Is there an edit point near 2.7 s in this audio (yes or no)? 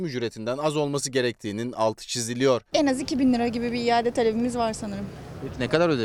yes